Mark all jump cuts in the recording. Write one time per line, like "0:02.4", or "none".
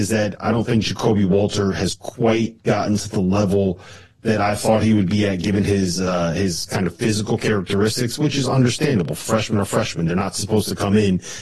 none